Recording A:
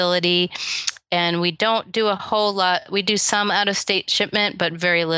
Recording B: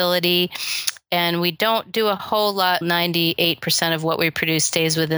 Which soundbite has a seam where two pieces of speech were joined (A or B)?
B